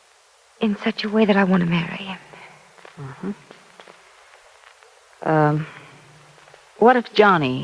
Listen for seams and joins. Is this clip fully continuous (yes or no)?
yes